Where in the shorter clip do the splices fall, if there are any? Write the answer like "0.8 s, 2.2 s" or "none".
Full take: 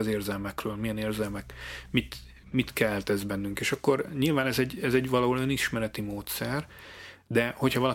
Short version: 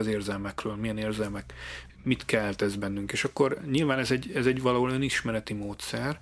1.9 s